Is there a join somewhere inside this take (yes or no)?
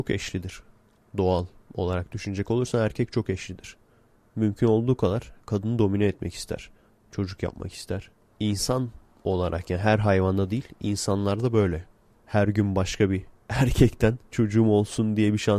yes